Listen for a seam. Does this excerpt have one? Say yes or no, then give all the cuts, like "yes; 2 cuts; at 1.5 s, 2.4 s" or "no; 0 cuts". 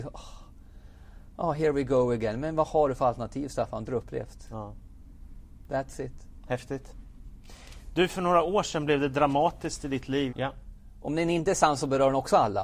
yes; 2 cuts; at 3.9 s, 10.3 s